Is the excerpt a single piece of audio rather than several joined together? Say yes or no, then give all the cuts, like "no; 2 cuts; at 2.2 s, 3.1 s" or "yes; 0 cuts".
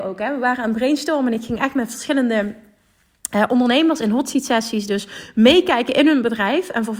yes; 0 cuts